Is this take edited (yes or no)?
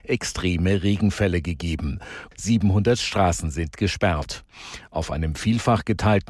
yes